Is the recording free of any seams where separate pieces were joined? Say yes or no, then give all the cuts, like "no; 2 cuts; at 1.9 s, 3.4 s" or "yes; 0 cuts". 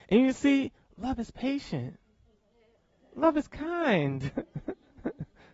yes; 0 cuts